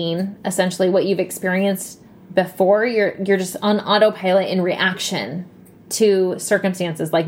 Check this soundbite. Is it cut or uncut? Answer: uncut